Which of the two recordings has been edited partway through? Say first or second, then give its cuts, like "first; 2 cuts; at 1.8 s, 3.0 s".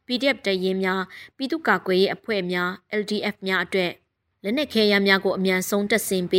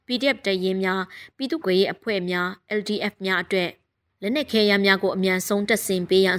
second; 1 cut; at 1.6 s